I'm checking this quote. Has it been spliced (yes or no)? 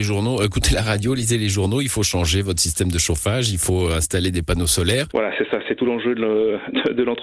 yes